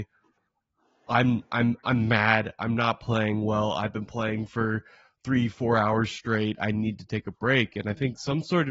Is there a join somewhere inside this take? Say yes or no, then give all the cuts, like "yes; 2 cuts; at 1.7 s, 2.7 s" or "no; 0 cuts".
no; 0 cuts